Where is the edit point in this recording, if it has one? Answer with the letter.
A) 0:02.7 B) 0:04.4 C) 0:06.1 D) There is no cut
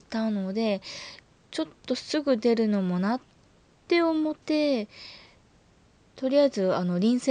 B